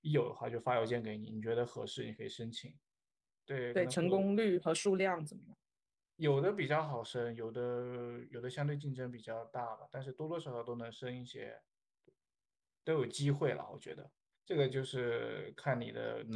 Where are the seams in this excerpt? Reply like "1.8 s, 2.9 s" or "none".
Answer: none